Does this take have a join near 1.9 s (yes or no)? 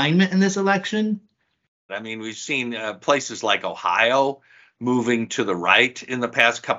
yes